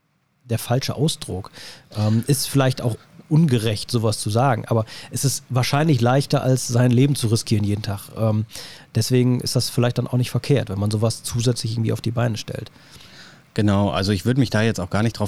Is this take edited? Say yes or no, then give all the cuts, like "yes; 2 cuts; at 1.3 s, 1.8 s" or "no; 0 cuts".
no; 0 cuts